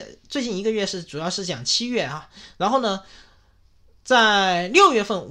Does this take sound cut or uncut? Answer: uncut